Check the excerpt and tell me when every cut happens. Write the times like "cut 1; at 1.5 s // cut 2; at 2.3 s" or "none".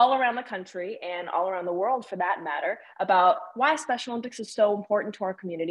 none